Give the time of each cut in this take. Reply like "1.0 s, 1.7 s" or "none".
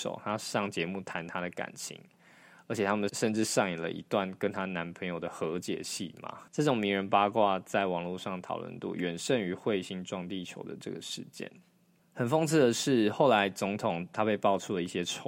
3.1 s, 6.5 s, 12.0 s